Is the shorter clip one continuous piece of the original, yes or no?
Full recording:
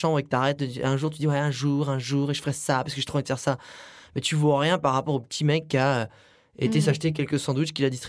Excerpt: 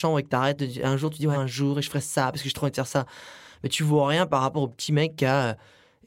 no